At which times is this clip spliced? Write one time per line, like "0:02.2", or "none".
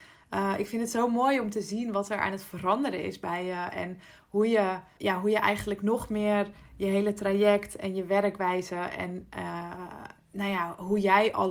0:05.0